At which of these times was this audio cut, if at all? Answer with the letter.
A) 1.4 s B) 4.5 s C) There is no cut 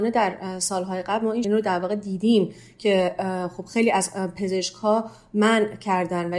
A